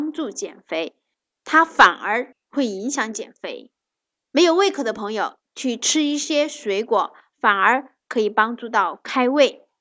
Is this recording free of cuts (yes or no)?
yes